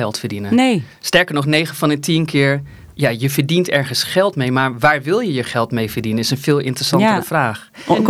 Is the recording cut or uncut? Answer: uncut